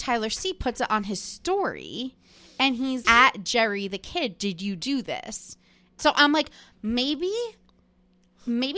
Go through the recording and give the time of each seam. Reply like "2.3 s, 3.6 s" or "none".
3.0 s, 6.0 s